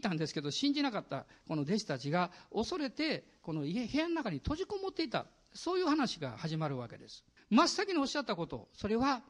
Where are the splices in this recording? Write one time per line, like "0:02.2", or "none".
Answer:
0:07.4